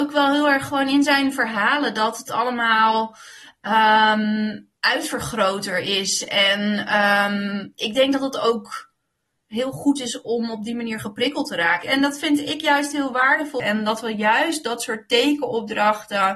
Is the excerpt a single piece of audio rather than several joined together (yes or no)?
no